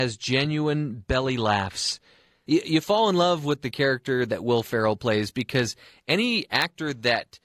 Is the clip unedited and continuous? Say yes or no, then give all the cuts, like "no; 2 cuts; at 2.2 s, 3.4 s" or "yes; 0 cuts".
yes; 0 cuts